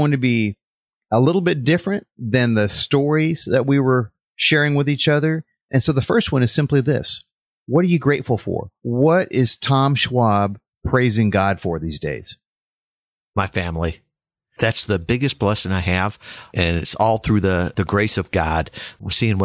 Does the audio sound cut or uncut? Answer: cut